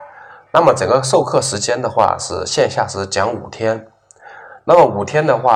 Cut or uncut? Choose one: uncut